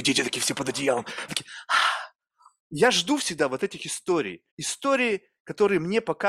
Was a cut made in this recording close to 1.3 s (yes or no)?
yes